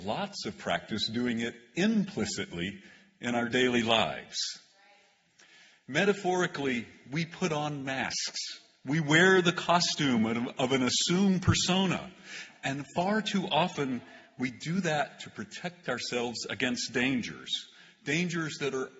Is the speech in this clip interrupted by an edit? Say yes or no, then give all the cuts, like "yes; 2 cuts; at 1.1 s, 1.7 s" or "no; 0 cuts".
no; 0 cuts